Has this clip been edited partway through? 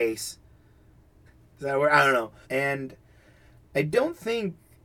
yes; 2 cuts; at 1.3 s, 2.4 s

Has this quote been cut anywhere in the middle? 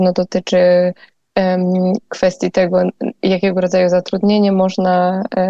no; 0 cuts

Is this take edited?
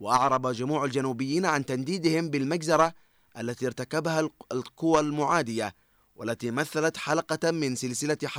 no; 0 cuts

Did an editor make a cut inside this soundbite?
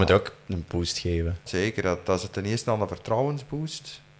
yes; 1 cut; at 1.5 s

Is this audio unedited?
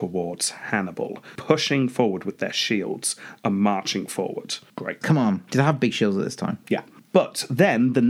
no; 2 cuts; at 1.4 s, 5.0 s

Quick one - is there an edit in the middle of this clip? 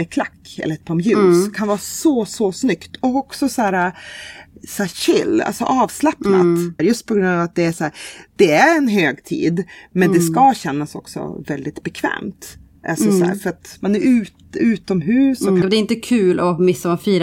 yes; 3 cuts; at 6.8 s, 13.8 s, 15.6 s

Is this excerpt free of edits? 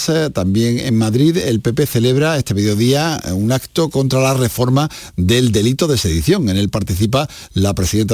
yes; 0 cuts

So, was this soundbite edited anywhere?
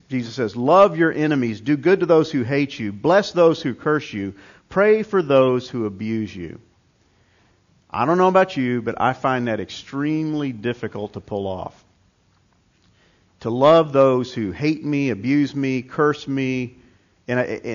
no; 0 cuts

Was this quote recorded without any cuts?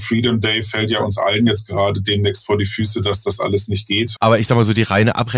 no; 1 cut; at 4.2 s

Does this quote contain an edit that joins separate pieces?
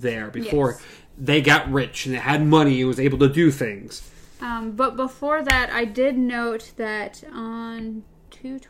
no; 0 cuts

